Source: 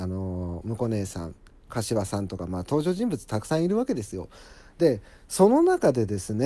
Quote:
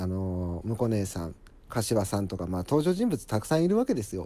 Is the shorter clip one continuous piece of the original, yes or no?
yes